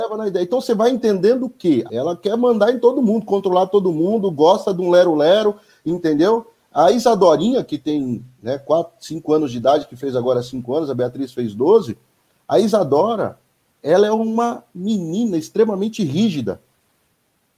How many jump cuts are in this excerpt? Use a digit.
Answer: 1